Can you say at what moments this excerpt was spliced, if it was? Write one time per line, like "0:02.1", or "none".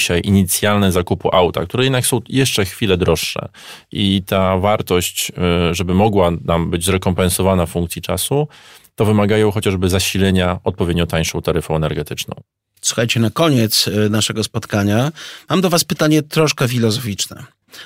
none